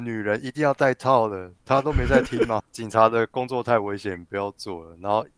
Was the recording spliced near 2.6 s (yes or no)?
yes